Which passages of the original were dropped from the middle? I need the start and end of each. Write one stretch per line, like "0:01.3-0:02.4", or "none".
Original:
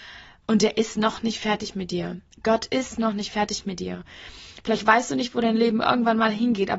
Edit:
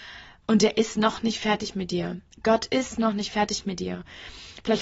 none